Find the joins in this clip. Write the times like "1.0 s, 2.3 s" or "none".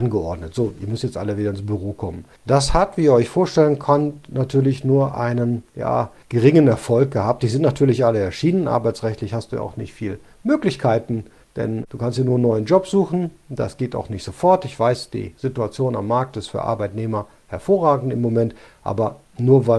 none